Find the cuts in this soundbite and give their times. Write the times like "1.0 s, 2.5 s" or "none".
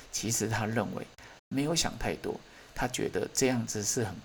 1.4 s